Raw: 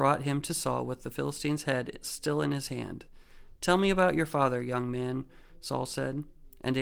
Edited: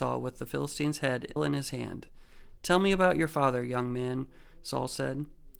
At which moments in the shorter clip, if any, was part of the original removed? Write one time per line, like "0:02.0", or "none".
0:01.4